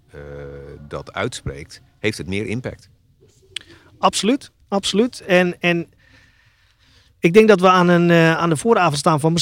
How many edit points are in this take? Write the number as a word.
zero